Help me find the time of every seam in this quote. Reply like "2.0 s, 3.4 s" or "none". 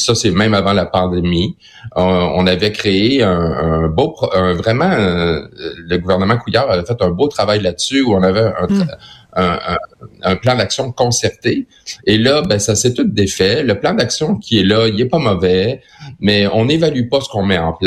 none